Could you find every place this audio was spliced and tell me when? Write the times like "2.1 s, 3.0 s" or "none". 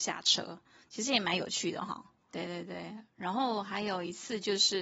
2.3 s

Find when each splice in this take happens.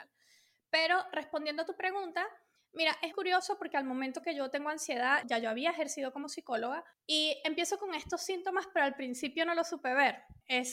3.1 s, 5.2 s

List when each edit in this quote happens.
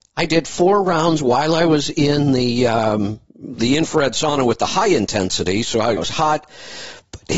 3.3 s, 6.0 s

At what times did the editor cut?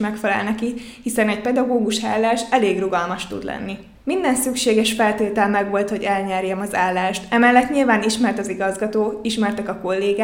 none

